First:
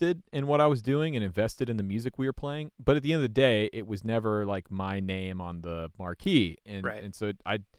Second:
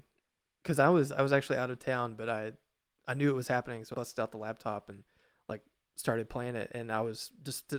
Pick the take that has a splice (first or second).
second